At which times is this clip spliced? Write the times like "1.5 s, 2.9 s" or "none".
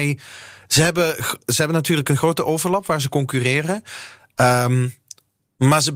none

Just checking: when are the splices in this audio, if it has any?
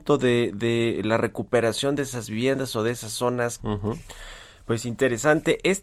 3.6 s

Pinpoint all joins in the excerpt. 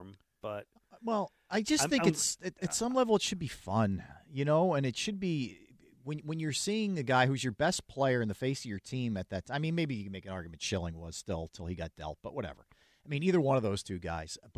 none

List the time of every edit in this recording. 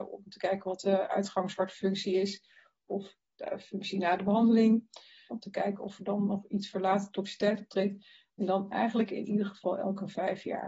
5.3 s

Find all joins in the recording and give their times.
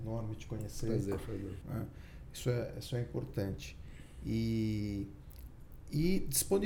1.6 s

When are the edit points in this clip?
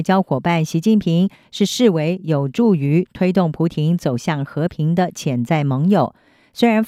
none

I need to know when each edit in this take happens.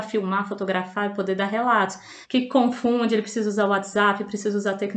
2.2 s

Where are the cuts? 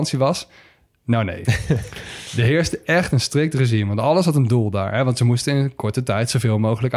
none

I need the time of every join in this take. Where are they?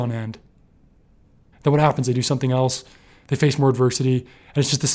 1.5 s

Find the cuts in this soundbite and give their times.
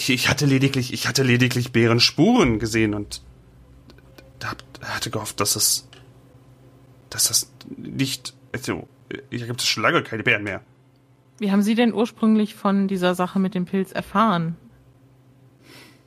none

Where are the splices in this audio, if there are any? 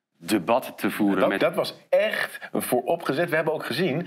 1.4 s

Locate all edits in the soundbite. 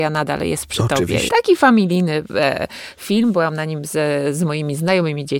1.3 s

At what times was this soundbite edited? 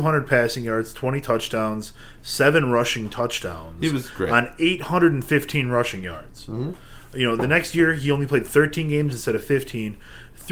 none

